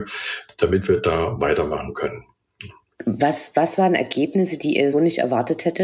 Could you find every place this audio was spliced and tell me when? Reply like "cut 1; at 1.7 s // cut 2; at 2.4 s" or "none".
cut 1; at 4.9 s

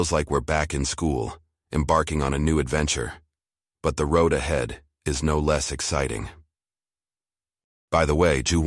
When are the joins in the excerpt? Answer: none

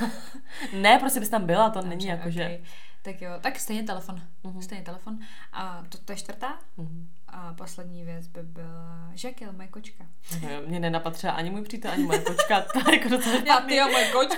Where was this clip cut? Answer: none

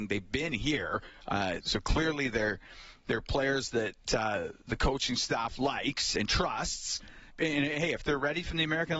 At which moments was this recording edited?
cut 1; at 1.6 s // cut 2; at 7.3 s

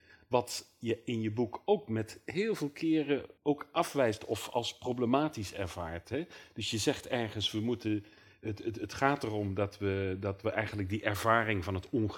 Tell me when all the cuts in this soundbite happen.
cut 1; at 3.4 s

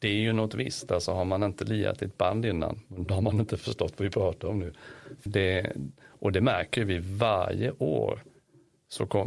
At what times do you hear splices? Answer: cut 1; at 5.3 s

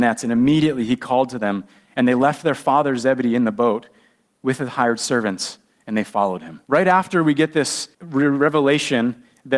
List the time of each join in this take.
cut 1; at 6.6 s // cut 2; at 7.9 s

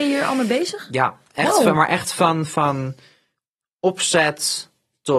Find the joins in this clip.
none

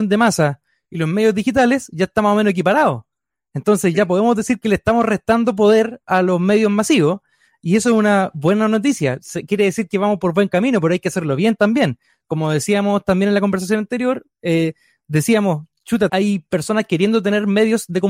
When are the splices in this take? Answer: cut 1; at 16.1 s

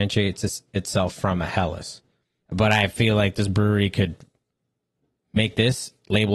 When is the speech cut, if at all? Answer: cut 1; at 2.4 s

